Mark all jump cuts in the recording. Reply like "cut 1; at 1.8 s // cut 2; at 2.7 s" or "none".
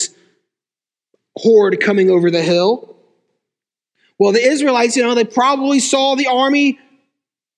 none